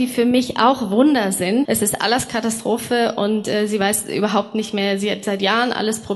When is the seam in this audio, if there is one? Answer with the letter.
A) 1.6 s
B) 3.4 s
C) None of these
A